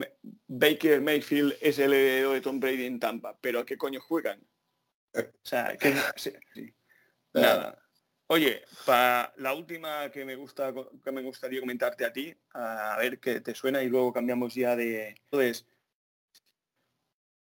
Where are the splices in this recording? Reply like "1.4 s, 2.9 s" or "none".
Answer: 6.5 s, 15.3 s